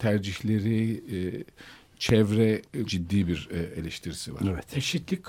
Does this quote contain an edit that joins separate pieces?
yes; 1 cut; at 2.9 s

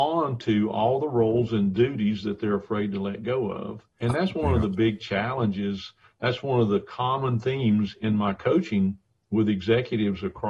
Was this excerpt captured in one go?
no; 1 cut; at 4.0 s

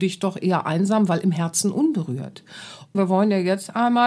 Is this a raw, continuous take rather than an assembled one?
no; 1 cut; at 2.9 s

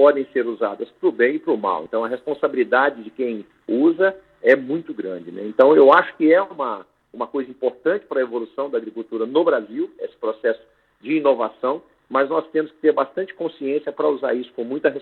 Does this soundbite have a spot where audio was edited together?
no; 0 cuts

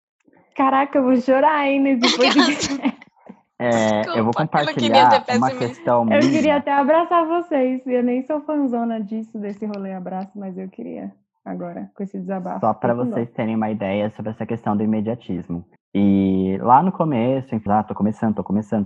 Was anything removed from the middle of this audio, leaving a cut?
yes; 2 cuts; at 15.8 s, 17.7 s

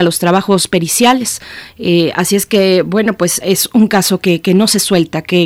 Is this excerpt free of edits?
no; 1 cut; at 3.4 s

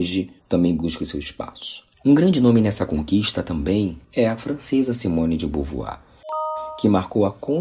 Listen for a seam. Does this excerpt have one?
yes; 2 cuts; at 1.9 s, 4.0 s

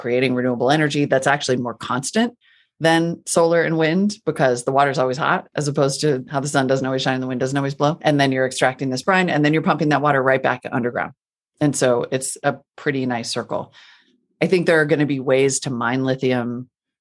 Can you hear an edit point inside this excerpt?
no; 0 cuts

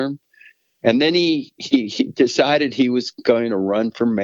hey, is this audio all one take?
yes; 0 cuts

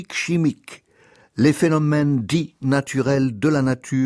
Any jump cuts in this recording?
no; 0 cuts

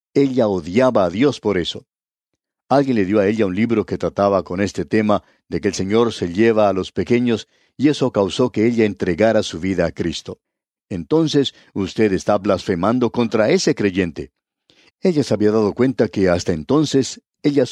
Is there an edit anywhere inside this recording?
yes; 2 cuts; at 10.8 s, 14.9 s

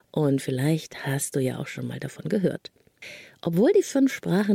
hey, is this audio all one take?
yes; 0 cuts

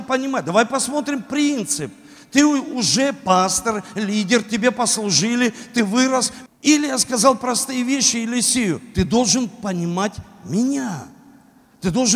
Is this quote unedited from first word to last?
no; 1 cut; at 6.5 s

